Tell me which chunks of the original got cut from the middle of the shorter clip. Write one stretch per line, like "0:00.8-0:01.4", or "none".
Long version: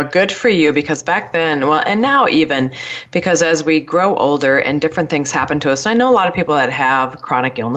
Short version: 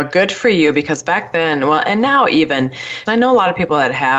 0:03.1-0:05.8

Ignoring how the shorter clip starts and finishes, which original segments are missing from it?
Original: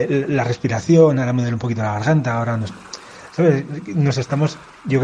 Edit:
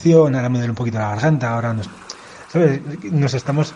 none

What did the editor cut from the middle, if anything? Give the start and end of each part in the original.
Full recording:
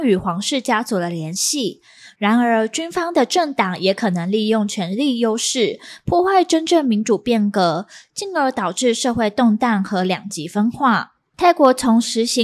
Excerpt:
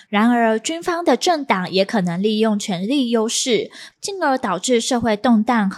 0:06.0-0:08.1

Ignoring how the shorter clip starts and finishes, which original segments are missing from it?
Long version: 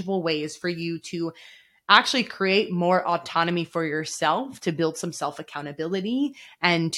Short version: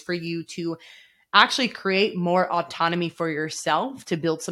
none

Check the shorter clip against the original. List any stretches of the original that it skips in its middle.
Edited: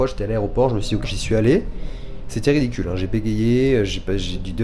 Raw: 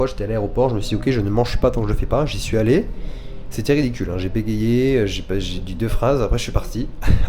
0:01.0-0:02.3

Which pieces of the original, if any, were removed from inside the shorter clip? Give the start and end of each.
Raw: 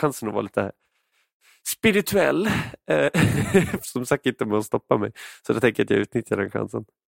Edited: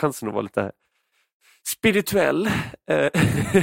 none

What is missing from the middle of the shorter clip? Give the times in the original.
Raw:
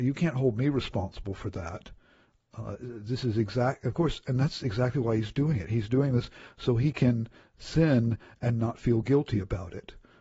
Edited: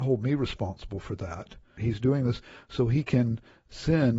0:02.1-0:05.7

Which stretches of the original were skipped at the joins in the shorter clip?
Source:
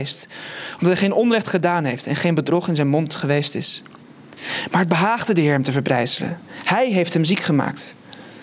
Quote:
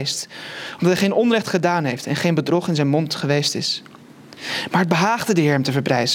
none

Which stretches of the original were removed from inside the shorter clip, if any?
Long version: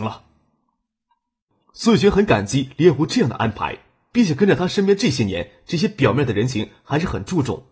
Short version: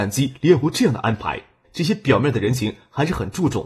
0:04.0-0:05.6

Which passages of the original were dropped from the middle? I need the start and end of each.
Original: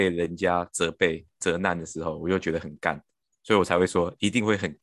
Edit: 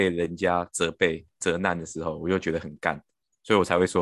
none

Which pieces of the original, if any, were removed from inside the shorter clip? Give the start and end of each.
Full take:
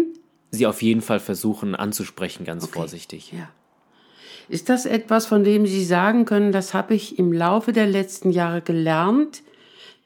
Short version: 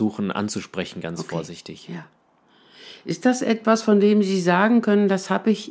none

